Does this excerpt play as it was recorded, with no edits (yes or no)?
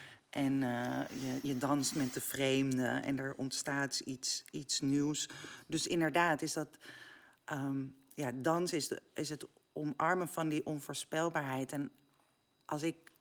yes